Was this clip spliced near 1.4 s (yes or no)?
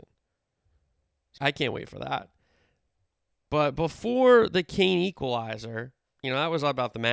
yes